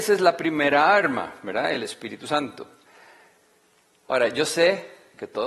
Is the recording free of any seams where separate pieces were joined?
yes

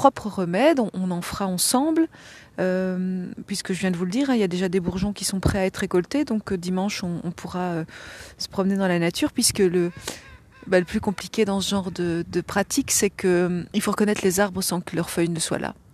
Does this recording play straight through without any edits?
no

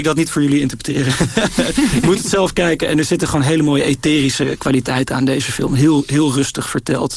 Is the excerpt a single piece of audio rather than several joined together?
yes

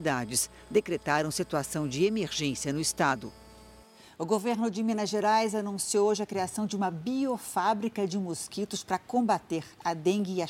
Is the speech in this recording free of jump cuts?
yes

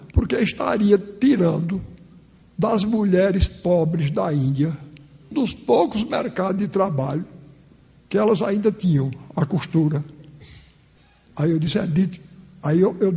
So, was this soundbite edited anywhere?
yes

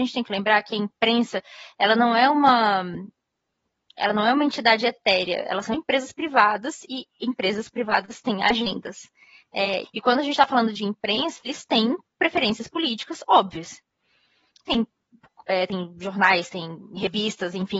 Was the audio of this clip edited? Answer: yes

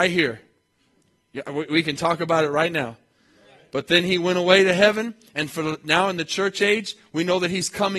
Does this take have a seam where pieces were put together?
no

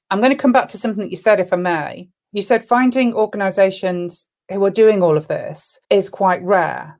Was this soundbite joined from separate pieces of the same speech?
yes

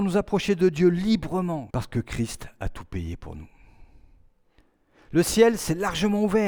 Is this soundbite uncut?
no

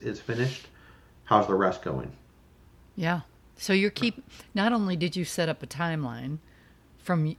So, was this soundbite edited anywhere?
no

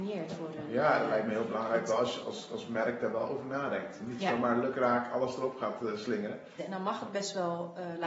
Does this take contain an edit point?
yes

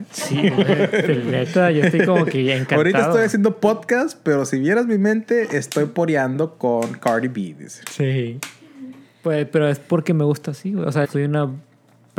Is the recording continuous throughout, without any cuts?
no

